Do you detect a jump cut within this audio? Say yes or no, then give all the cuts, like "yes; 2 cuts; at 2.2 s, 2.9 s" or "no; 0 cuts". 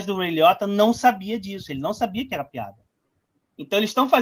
no; 0 cuts